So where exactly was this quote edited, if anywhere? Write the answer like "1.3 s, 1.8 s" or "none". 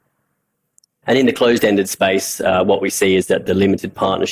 1.0 s